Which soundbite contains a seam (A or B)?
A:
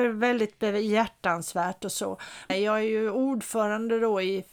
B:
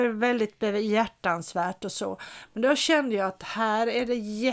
A